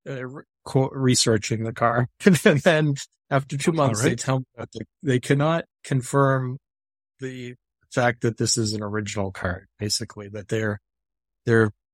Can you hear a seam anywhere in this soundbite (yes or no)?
no